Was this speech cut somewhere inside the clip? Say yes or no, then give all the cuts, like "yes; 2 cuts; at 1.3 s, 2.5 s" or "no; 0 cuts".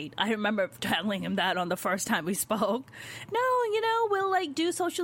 yes; 1 cut; at 3.2 s